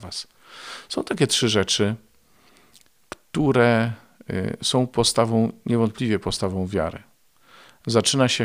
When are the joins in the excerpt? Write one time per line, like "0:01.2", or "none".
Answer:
none